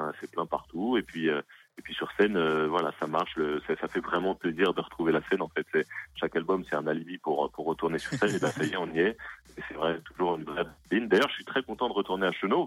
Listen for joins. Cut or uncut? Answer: uncut